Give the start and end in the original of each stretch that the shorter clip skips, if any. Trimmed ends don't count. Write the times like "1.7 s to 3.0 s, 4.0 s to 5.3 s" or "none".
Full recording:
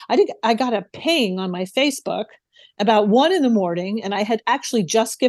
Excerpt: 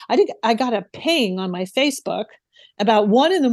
none